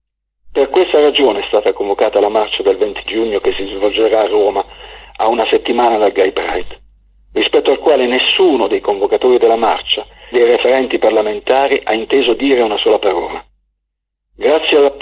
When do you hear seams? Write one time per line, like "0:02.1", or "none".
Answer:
0:10.3